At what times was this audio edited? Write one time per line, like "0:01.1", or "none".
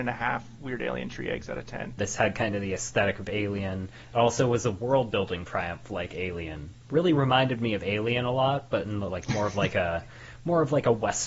0:02.0